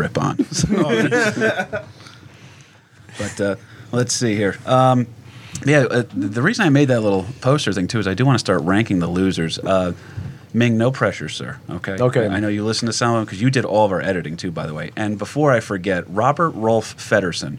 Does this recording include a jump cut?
no; 0 cuts

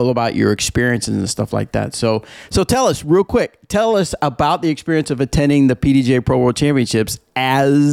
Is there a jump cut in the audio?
no; 0 cuts

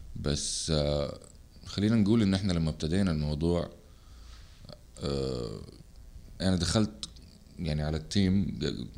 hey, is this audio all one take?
no; 1 cut; at 6.4 s

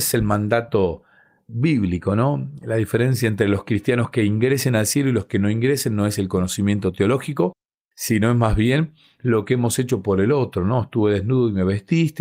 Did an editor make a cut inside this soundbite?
no; 0 cuts

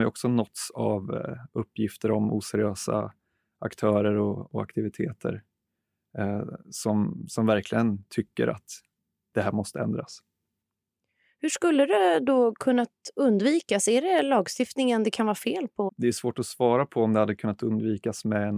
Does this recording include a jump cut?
yes; 1 cut; at 15.9 s

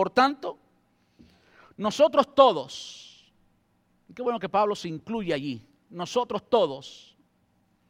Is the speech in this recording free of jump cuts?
yes; 0 cuts

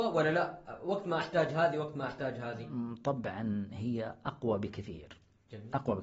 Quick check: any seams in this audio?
no; 0 cuts

